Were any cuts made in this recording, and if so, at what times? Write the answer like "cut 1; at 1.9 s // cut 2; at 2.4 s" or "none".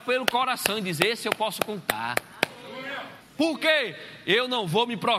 cut 1; at 3.2 s